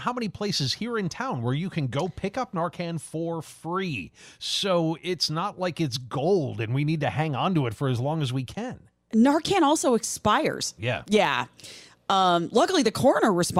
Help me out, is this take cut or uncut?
cut